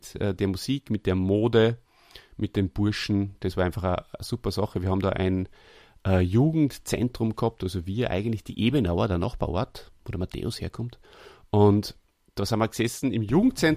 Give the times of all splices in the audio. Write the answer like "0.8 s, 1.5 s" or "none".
none